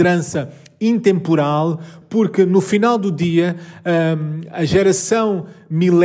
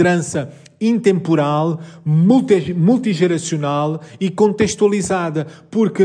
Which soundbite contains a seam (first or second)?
first